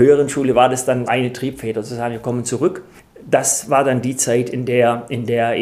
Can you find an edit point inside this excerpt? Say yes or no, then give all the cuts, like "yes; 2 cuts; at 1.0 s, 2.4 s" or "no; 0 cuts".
yes; 1 cut; at 1.1 s